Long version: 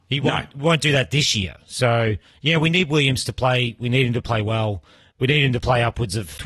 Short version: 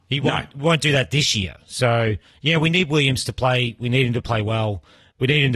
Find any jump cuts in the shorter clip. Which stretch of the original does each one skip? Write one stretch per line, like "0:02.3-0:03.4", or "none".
none